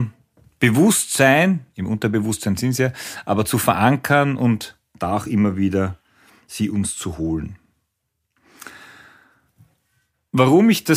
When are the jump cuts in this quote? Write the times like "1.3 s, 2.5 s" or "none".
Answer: none